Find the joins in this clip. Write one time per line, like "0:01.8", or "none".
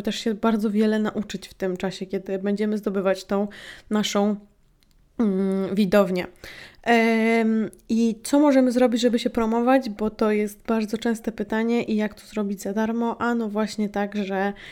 none